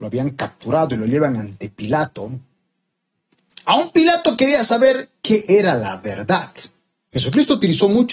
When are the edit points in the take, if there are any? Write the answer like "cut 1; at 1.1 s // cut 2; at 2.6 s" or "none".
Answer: none